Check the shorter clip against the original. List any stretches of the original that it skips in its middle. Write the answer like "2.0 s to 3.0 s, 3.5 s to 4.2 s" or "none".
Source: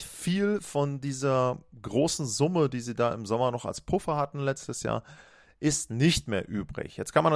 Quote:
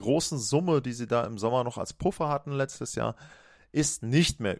none